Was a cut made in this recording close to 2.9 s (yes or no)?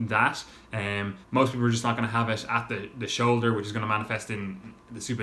no